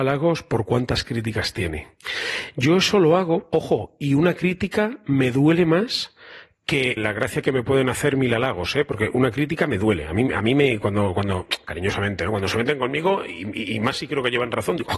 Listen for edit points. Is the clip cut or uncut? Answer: cut